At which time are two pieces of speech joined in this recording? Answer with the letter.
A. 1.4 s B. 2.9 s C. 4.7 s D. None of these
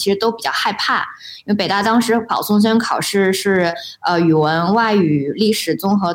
D